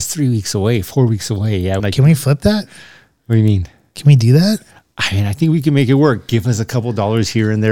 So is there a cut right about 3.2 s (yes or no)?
no